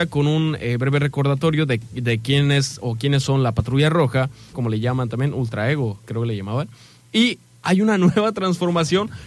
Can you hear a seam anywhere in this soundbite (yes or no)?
yes